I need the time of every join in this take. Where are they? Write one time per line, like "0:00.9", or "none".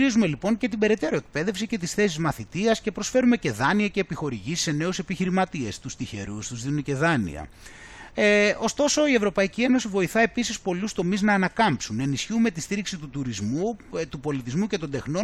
none